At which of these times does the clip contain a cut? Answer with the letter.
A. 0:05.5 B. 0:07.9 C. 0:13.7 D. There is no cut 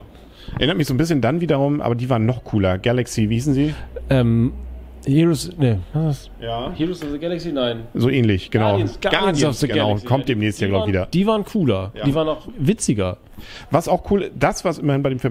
D